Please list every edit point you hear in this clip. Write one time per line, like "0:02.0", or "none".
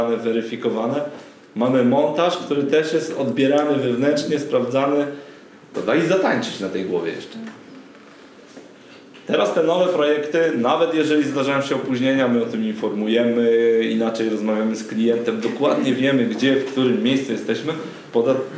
0:05.7